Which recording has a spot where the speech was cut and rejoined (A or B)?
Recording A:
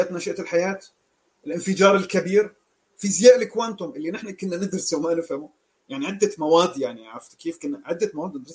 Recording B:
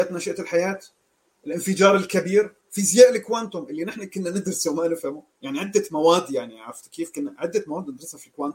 B